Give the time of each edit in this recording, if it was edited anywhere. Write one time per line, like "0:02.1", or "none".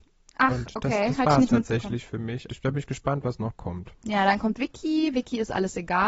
0:02.5